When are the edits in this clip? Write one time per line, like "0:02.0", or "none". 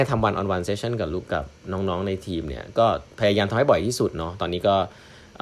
0:01.2